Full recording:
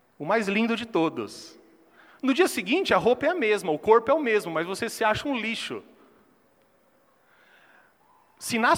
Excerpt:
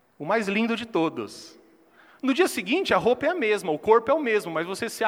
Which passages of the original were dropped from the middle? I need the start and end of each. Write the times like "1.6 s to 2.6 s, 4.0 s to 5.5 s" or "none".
none